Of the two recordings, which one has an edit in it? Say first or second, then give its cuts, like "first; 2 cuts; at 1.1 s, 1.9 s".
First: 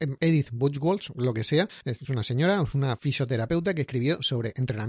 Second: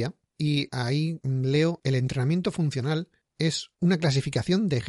second; 1 cut; at 3.7 s